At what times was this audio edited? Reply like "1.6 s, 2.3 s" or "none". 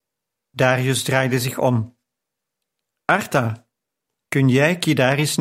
none

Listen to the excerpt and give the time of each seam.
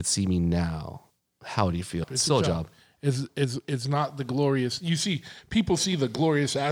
2.0 s

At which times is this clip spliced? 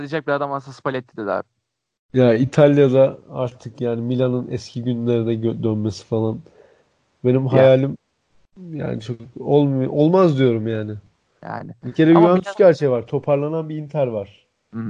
none

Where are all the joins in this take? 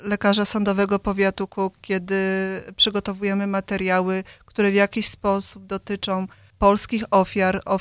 none

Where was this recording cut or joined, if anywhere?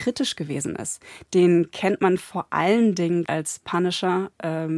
1.3 s, 3.3 s

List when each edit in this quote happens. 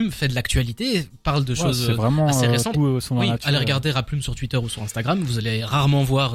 2.7 s

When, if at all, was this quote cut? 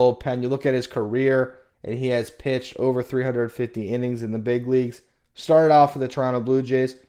1.7 s

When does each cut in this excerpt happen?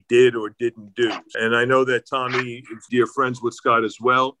1.3 s, 2.9 s

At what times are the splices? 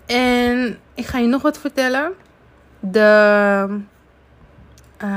none

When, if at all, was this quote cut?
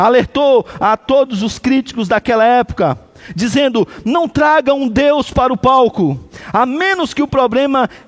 none

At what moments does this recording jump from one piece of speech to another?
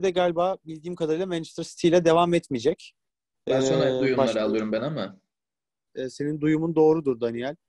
5.9 s

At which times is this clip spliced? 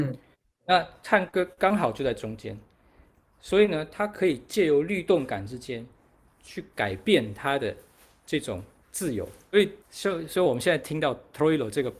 9.8 s

